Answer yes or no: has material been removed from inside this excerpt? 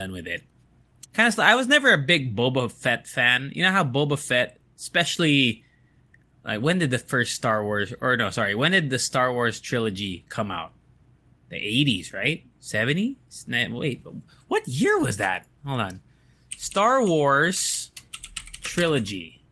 yes